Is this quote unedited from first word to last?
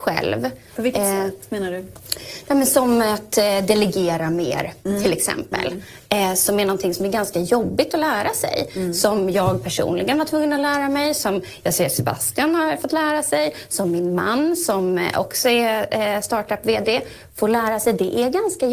yes; 0 cuts

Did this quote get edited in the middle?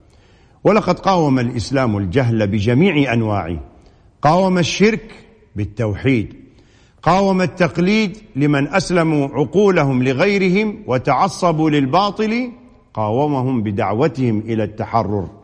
no; 0 cuts

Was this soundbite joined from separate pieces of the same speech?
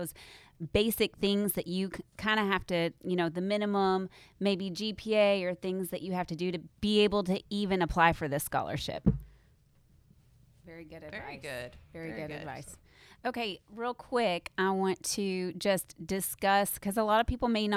yes; 1 cut; at 10.6 s

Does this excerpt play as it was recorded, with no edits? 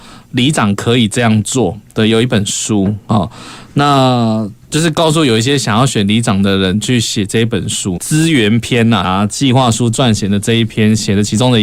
no; 2 cuts; at 8.0 s, 9.0 s

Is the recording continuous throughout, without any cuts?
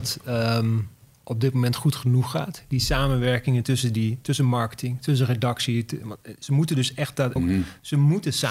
no; 1 cut; at 7.4 s

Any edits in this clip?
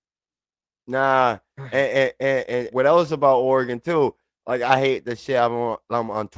yes; 1 cut; at 2.7 s

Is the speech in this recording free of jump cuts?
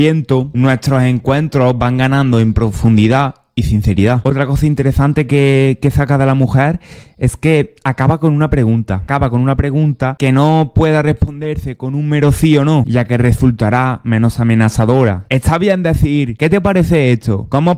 yes; 0 cuts

